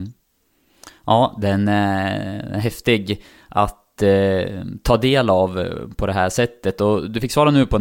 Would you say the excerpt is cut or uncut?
uncut